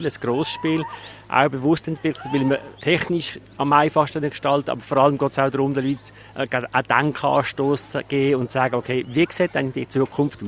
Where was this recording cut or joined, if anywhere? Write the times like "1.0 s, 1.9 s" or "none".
2.8 s